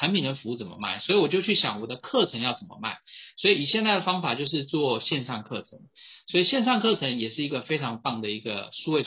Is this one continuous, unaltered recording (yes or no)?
yes